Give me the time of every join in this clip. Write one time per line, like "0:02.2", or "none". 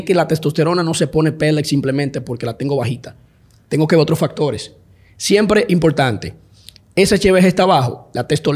none